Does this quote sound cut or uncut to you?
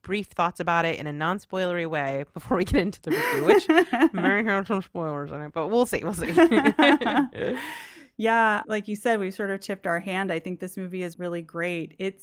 cut